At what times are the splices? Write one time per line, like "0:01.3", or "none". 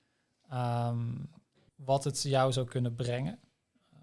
0:01.7

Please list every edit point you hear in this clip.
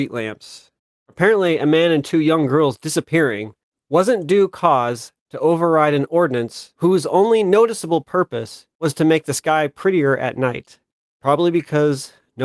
none

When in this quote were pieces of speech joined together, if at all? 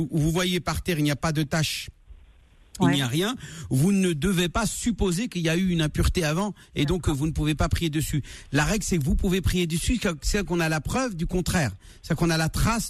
none

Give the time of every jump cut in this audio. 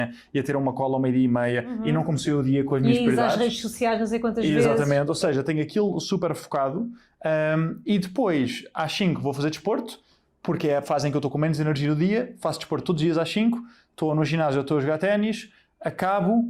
none

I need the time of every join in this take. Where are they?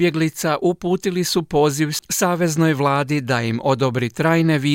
none

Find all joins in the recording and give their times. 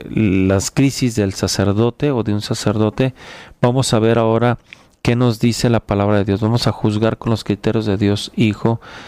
none

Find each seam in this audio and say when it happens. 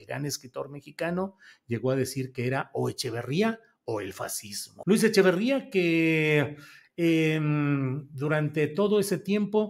0:04.8

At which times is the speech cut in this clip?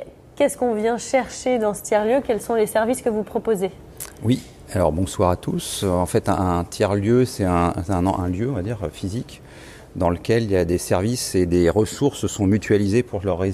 none

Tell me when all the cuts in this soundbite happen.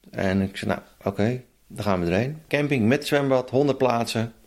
0:02.5

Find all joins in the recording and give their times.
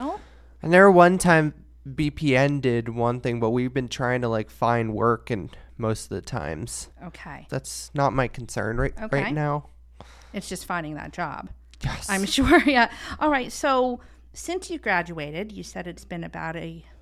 0:07.5

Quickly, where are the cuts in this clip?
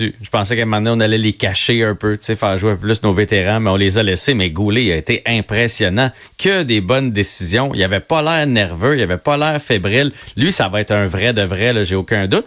none

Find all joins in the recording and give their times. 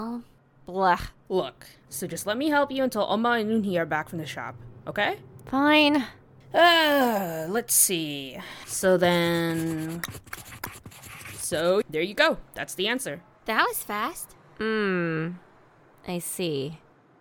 0:01.9
0:08.6
0:11.8

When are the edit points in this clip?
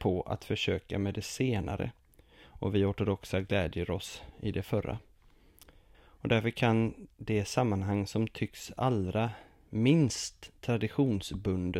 0:05.9

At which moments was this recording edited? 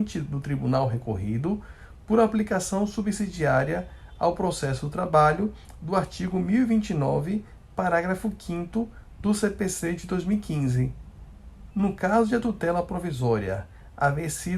0:11.7

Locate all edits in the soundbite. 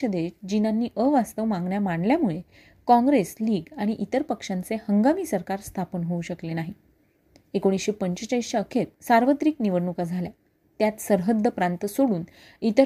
none

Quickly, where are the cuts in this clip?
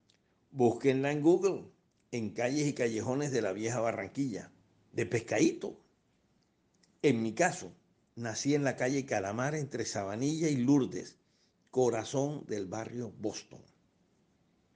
0:04.9

